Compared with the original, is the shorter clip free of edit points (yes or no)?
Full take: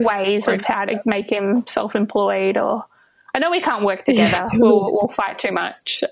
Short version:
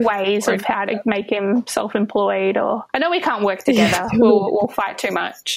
no